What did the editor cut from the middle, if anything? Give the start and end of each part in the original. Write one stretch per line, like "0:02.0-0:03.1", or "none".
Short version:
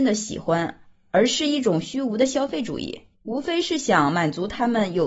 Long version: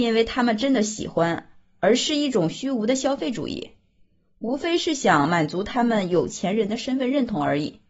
0:03.8-0:04.3